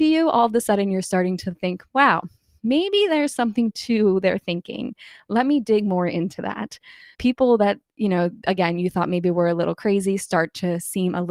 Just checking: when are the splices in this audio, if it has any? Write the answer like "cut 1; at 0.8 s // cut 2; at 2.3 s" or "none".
cut 1; at 7.1 s